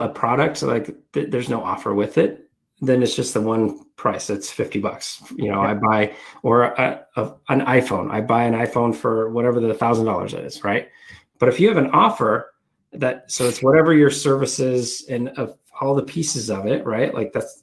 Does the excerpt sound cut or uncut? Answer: uncut